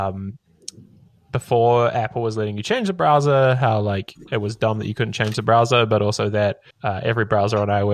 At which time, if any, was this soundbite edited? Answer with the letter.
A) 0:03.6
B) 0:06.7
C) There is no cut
B